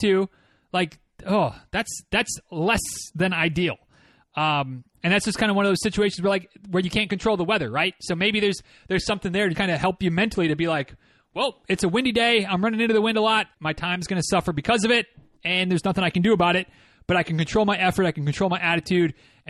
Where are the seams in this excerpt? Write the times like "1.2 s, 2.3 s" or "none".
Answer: 9.5 s, 13.5 s